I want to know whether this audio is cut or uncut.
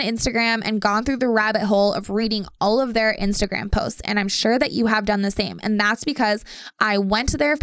uncut